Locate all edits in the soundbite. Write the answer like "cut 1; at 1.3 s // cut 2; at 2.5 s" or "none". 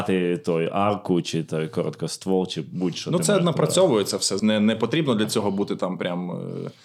cut 1; at 4.4 s